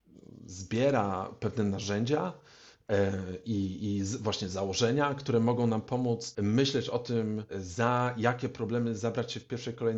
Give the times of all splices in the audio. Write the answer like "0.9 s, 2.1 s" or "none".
none